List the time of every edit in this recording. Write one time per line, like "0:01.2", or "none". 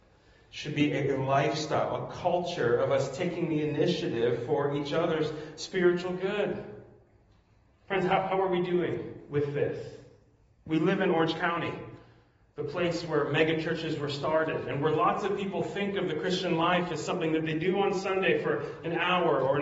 none